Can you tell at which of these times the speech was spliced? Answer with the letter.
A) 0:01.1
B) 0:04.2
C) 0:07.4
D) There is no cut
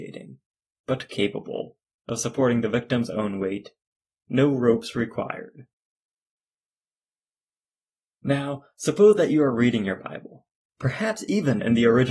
A